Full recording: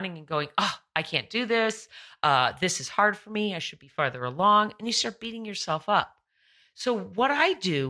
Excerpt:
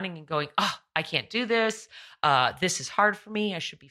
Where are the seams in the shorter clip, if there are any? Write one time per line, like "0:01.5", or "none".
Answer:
none